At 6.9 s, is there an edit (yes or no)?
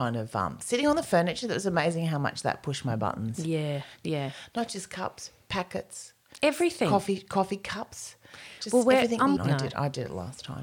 no